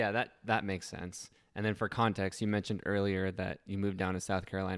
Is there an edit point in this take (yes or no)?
no